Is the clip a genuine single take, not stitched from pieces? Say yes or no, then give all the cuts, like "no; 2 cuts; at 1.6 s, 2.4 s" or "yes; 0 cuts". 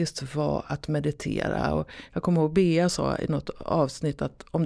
yes; 0 cuts